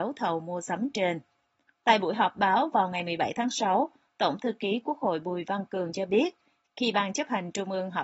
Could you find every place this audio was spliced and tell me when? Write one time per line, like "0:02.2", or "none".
0:01.7